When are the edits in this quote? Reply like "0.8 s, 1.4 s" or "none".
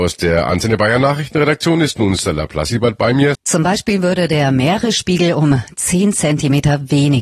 3.4 s